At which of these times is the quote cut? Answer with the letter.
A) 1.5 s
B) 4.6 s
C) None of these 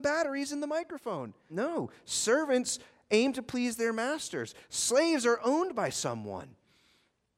A